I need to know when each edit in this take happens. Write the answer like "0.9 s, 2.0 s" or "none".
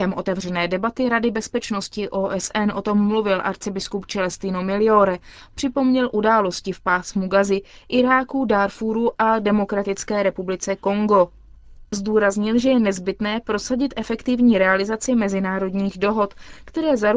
5.5 s